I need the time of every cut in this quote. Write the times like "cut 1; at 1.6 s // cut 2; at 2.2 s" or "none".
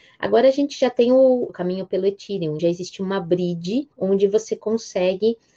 cut 1; at 1.5 s // cut 2; at 2.6 s // cut 3; at 3.9 s